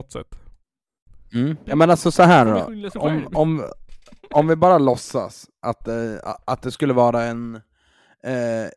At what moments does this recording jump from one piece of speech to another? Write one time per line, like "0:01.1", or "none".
0:01.6